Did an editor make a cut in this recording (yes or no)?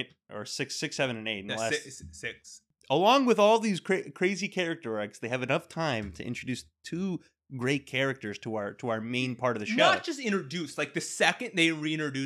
no